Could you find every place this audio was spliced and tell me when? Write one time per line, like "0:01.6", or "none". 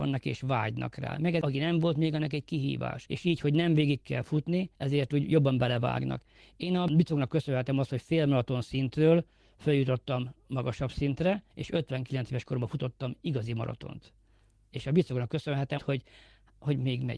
0:11.5
0:15.8